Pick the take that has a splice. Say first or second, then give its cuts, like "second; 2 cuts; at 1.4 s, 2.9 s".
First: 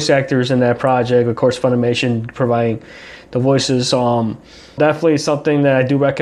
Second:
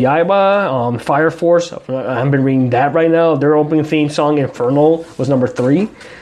first; 1 cut; at 4.8 s